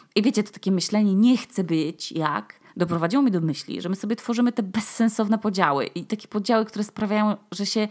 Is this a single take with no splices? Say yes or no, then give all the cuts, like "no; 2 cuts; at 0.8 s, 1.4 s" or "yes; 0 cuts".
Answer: no; 1 cut; at 2.7 s